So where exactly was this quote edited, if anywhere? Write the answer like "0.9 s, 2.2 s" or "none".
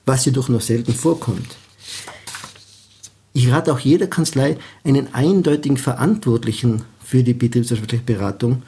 3.3 s